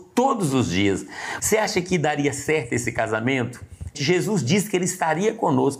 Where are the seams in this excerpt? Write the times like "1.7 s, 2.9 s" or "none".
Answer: 1.4 s, 3.9 s